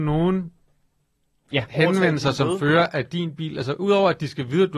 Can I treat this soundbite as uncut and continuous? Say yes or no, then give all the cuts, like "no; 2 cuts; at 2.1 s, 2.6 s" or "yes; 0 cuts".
yes; 0 cuts